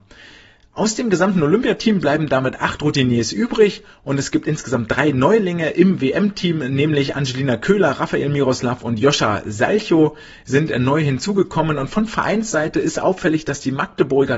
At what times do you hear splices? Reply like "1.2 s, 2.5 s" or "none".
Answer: none